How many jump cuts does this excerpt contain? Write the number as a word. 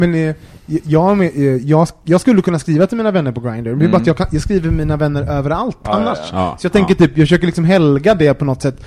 zero